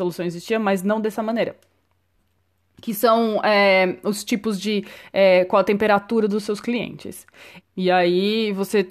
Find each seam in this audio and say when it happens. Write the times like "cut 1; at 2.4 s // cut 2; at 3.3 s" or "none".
cut 1; at 7.6 s